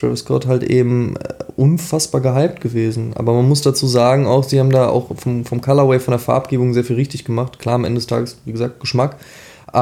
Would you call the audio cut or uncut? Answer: uncut